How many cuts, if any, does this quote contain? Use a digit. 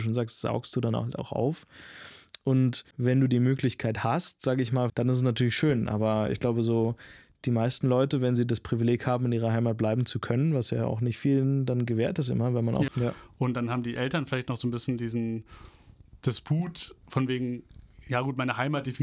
3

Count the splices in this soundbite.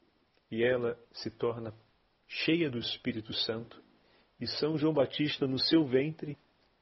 0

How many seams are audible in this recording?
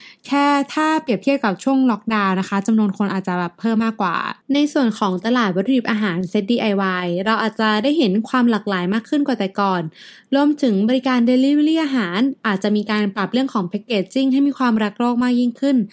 1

